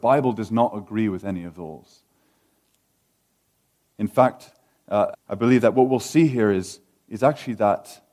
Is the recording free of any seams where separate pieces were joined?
no; 1 cut; at 5.1 s

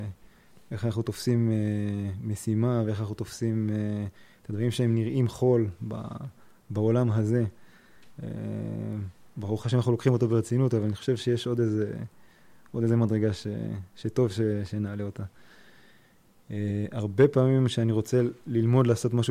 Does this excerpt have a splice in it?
no; 0 cuts

